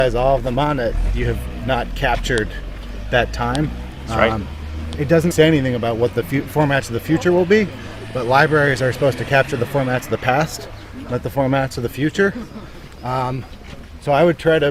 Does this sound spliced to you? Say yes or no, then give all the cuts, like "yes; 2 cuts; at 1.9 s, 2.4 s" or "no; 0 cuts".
yes; 1 cut; at 5.3 s